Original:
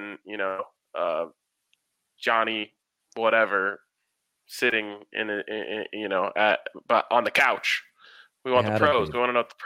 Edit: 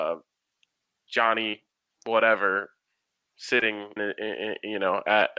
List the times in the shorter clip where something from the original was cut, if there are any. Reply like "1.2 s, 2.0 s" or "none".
4.0 s